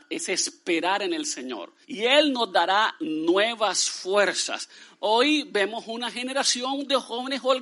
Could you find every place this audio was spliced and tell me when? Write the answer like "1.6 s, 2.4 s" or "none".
1.8 s